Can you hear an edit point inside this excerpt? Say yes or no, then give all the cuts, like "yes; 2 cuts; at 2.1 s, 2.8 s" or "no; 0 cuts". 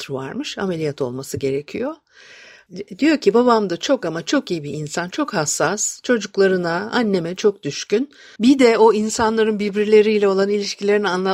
yes; 1 cut; at 8.4 s